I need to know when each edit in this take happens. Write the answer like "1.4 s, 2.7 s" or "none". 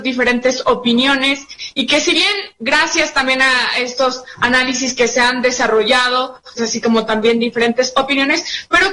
6.6 s